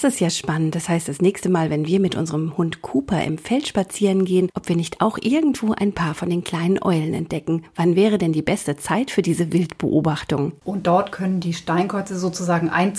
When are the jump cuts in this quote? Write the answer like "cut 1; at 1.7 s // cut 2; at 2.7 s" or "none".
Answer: cut 1; at 4.5 s // cut 2; at 10.6 s